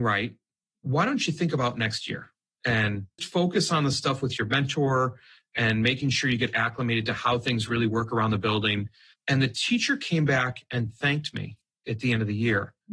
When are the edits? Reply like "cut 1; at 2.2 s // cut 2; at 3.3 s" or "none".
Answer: cut 1; at 3.2 s